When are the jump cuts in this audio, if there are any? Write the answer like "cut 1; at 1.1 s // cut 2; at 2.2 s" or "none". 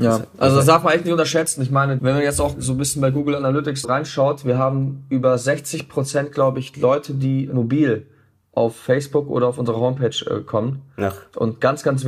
cut 1; at 2.0 s // cut 2; at 3.8 s